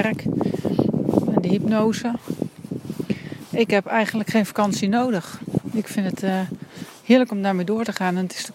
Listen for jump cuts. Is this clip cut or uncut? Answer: uncut